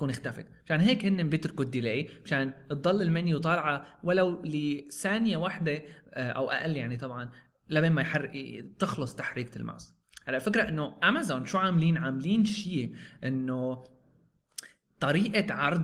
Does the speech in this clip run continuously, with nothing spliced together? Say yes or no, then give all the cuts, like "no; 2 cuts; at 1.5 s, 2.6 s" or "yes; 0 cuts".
yes; 0 cuts